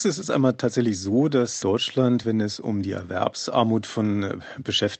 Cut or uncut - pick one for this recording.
uncut